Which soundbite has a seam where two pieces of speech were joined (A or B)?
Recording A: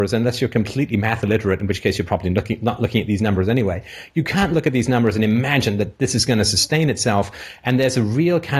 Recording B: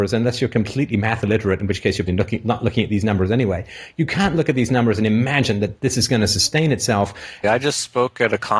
B